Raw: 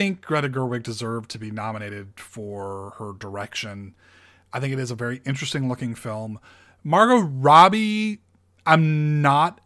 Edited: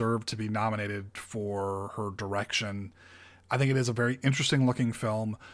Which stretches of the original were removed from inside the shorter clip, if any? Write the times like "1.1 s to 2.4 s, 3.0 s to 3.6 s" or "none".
none